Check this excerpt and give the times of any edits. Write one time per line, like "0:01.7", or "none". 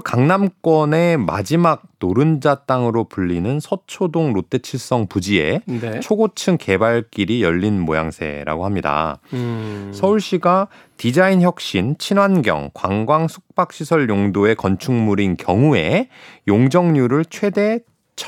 none